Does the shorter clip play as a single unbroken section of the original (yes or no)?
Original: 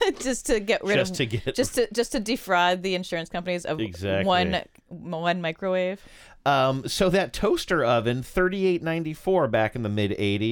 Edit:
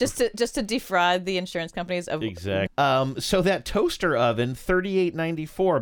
no